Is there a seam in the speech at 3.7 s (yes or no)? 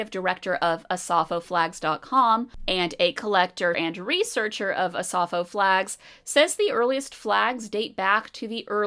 yes